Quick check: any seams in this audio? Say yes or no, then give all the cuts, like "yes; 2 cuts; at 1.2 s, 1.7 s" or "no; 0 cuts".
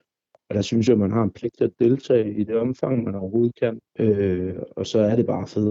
yes; 1 cut; at 3.9 s